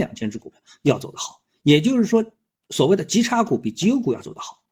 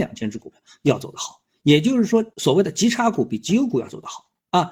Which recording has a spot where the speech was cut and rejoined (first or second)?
second